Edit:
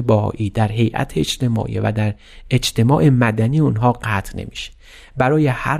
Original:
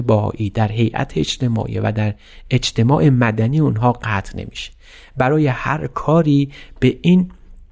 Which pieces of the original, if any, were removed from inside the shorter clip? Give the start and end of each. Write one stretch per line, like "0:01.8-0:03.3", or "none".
none